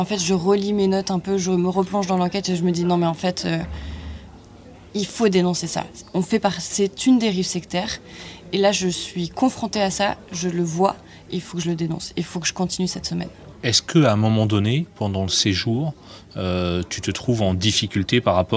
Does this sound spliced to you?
no; 0 cuts

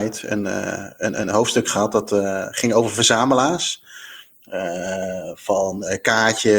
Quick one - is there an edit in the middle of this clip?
no; 0 cuts

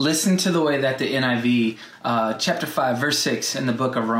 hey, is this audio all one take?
yes; 0 cuts

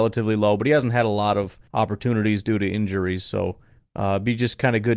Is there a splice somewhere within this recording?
yes; 1 cut; at 1.7 s

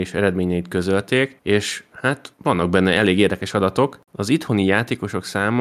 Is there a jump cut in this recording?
yes; 1 cut; at 4.0 s

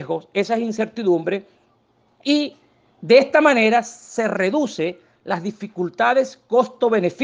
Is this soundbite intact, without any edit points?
yes; 0 cuts

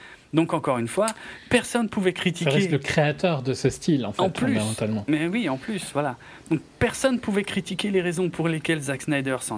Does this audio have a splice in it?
no; 0 cuts

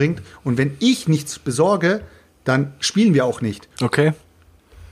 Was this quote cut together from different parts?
yes; 1 cut; at 3.7 s

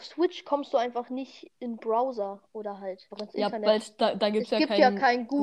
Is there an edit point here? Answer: yes; 1 cut; at 3.1 s

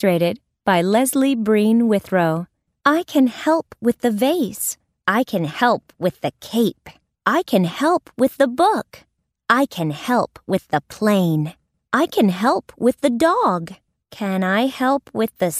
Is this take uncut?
no; 1 cut; at 14.0 s

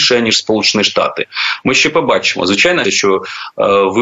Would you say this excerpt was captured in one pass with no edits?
no; 2 cuts; at 1.6 s, 2.8 s

